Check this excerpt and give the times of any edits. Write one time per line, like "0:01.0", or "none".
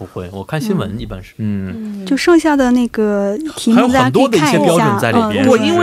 0:01.3